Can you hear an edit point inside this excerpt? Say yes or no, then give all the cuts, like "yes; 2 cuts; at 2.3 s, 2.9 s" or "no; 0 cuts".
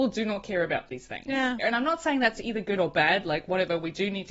yes; 1 cut; at 1.6 s